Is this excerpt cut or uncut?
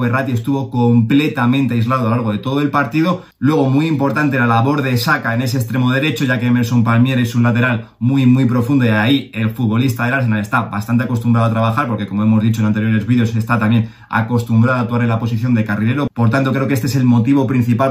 uncut